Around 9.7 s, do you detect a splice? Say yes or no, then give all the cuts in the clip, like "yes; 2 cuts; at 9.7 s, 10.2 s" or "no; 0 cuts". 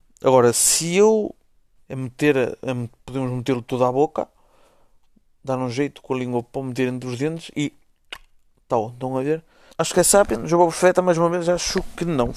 yes; 2 cuts; at 1.8 s, 9.7 s